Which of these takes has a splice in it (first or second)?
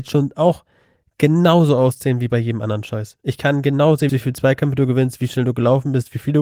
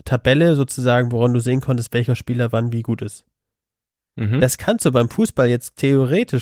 first